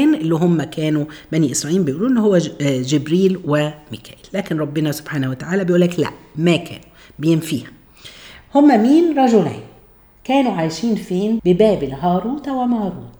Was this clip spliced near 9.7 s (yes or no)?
no